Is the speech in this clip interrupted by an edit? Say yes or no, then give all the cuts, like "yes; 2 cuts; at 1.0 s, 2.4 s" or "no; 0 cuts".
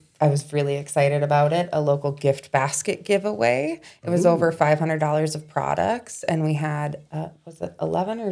no; 0 cuts